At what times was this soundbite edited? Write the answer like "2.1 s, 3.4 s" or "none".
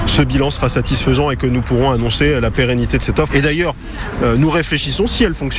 3.3 s